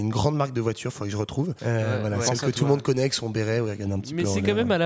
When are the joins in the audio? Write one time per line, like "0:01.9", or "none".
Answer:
0:01.6